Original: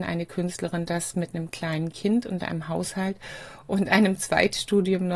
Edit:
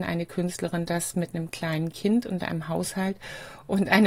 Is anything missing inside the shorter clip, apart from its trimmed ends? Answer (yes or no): no